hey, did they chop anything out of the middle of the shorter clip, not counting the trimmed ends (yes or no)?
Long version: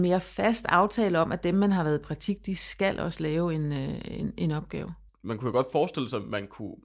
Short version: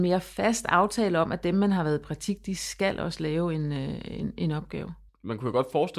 no